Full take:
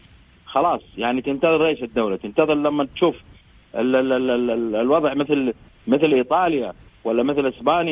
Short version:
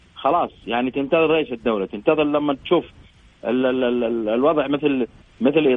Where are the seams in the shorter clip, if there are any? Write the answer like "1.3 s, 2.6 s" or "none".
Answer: 3.6 s